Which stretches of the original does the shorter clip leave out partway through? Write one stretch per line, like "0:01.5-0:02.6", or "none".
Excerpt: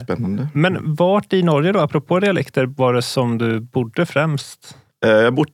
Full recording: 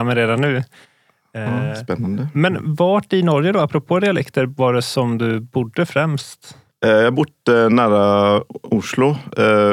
none